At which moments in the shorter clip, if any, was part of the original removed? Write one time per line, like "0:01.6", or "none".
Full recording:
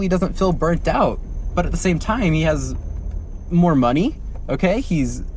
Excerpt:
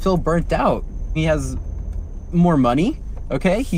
0:01.2